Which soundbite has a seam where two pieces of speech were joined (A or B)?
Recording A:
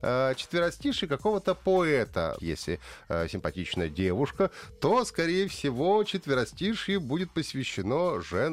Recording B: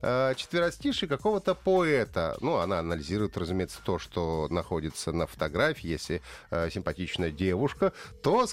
A